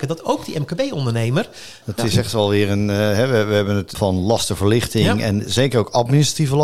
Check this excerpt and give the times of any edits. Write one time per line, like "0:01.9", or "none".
0:01.8
0:03.9